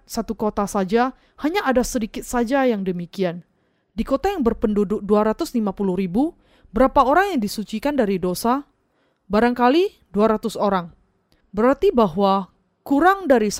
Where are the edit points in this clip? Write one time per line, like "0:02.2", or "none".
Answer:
0:11.4

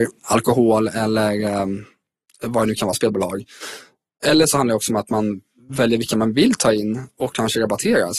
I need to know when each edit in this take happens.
none

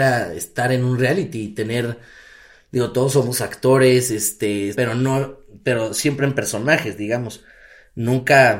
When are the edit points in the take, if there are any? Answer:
0:04.8

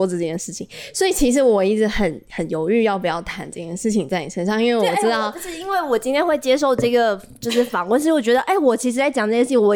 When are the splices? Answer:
none

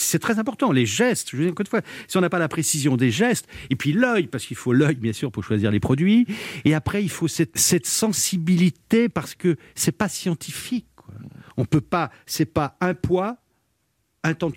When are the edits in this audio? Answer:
0:07.6

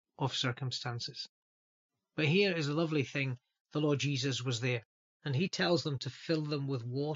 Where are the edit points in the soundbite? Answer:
0:05.1

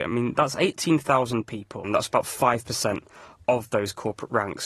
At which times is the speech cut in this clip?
0:01.8

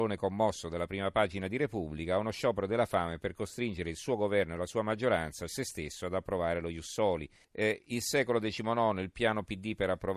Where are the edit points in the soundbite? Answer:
0:05.5
0:07.4

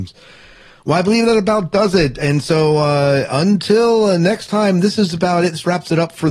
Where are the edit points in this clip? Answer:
none

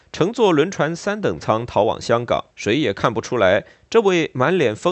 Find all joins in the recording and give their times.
0:02.5

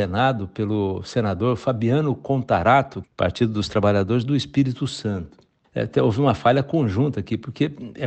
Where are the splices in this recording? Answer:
0:03.0
0:05.6

